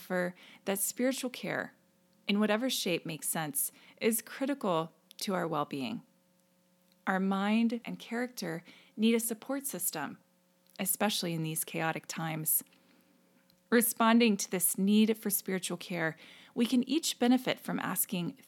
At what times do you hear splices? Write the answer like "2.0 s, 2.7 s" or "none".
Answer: 7.8 s